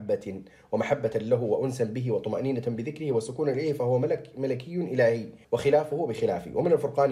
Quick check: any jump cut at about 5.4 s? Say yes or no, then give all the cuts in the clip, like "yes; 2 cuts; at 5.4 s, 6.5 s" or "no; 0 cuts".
yes; 1 cut; at 5.4 s